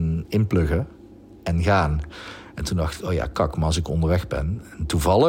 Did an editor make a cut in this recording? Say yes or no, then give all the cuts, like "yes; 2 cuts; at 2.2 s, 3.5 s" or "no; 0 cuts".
no; 0 cuts